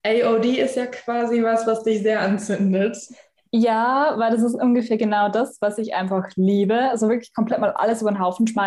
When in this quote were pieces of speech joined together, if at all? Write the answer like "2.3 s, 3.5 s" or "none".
none